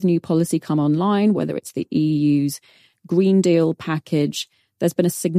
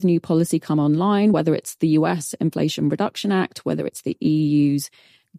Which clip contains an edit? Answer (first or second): first